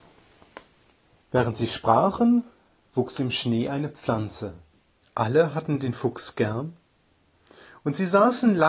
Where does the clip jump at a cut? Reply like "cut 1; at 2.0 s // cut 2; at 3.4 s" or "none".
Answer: cut 1; at 5.0 s